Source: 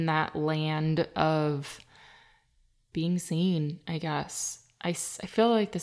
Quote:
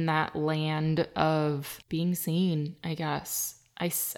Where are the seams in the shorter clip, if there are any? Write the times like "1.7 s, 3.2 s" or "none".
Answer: 1.8 s